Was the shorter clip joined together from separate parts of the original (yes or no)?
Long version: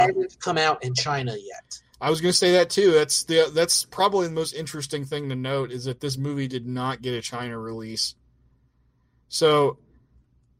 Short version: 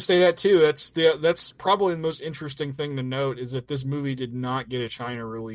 no